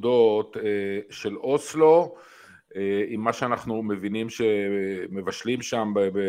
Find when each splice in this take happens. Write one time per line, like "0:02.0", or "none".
none